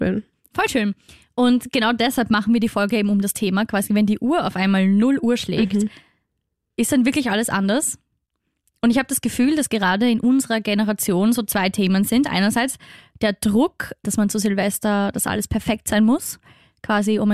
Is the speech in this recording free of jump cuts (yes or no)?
no